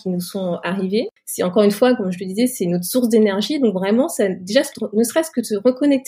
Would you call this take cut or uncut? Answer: cut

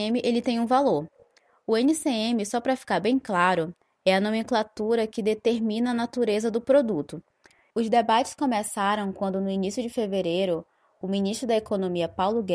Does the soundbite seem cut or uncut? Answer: cut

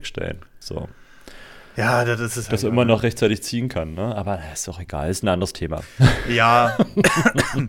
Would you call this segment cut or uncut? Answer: uncut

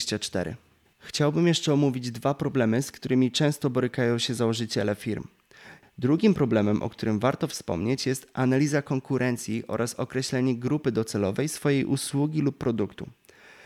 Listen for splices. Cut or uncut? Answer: cut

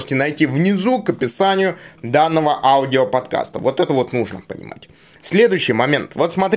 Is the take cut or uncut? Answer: uncut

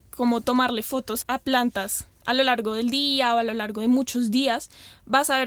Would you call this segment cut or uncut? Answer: cut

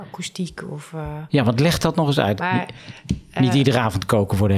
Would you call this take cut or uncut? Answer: cut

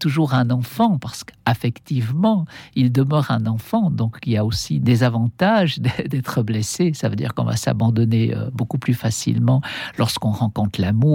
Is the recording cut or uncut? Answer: uncut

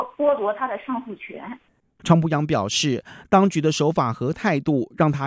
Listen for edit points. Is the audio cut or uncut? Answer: cut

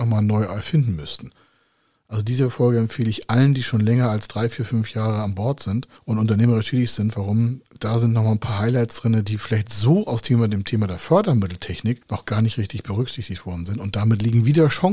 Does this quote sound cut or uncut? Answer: uncut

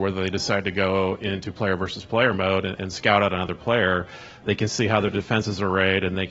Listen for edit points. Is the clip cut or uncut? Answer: cut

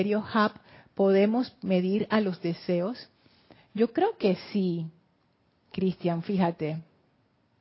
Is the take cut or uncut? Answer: uncut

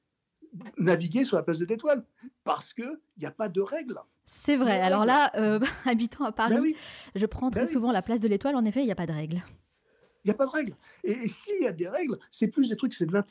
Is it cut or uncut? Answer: uncut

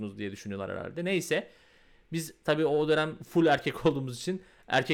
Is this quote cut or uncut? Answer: uncut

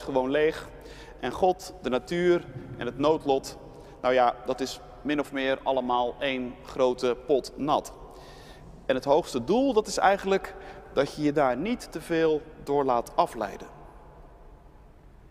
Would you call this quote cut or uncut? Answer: uncut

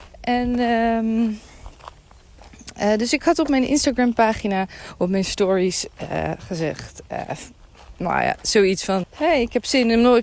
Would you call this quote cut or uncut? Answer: cut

